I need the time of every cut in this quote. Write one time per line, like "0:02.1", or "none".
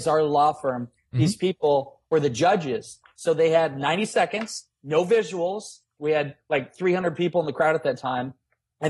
0:06.0